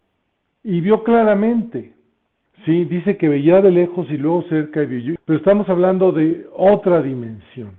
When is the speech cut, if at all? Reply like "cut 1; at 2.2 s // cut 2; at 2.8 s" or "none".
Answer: cut 1; at 2.5 s // cut 2; at 5.2 s

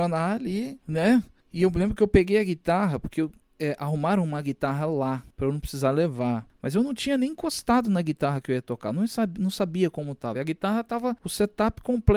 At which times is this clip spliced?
none

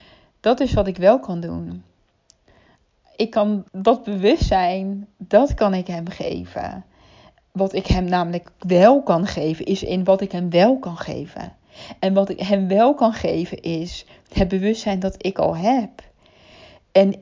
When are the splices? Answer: cut 1; at 3.7 s // cut 2; at 7.4 s

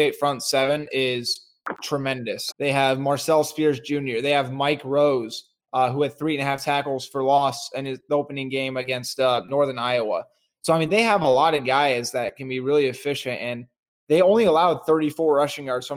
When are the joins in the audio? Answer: cut 1; at 2.5 s

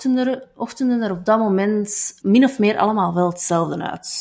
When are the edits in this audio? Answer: cut 1; at 2.2 s

